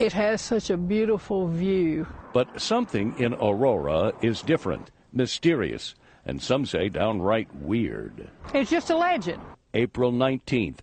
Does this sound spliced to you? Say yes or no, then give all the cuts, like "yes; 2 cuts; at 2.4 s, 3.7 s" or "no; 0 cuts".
no; 0 cuts